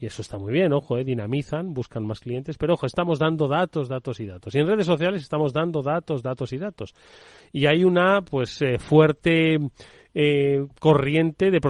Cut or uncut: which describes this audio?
uncut